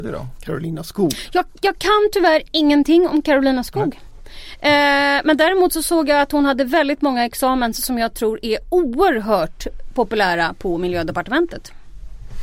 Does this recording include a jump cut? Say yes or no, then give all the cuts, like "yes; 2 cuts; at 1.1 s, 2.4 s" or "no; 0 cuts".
no; 0 cuts